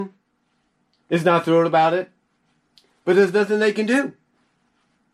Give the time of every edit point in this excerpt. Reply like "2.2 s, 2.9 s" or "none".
none